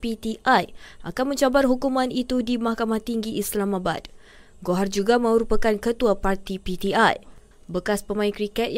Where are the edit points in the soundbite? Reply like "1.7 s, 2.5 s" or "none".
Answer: 7.5 s